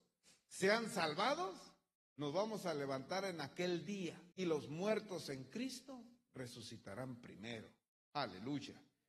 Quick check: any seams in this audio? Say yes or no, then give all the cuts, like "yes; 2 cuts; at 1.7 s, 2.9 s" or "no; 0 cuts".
yes; 2 cuts; at 2.0 s, 4.3 s